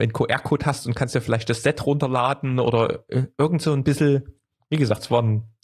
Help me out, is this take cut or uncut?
uncut